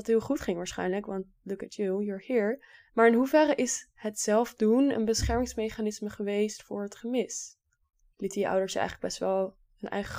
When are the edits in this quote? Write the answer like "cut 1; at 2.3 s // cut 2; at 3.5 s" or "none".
cut 1; at 2.9 s // cut 2; at 8.0 s